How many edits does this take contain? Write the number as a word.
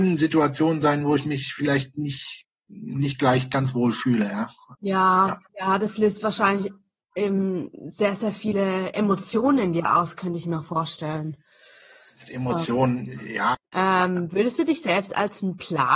two